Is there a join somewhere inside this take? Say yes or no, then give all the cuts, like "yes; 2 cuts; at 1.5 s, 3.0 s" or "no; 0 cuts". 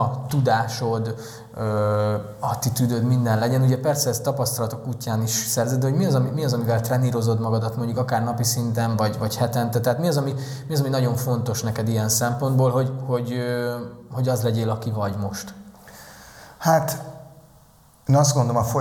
no; 0 cuts